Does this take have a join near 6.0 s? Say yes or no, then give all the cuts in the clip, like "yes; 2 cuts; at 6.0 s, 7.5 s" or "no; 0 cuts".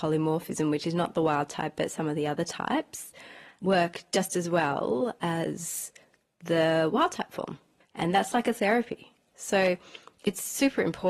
no; 1 cut; at 7.8 s